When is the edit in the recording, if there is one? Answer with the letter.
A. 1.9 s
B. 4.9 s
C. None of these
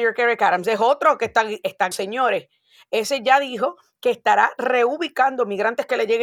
A